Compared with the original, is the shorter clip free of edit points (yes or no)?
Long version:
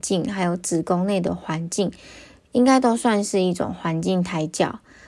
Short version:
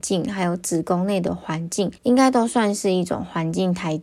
no